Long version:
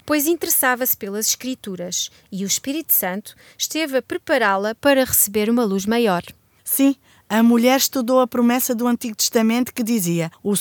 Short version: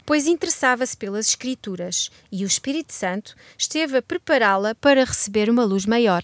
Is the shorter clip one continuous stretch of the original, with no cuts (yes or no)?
yes